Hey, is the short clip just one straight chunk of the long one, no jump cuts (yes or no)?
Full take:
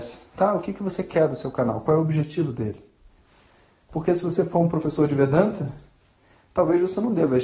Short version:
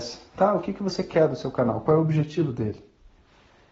yes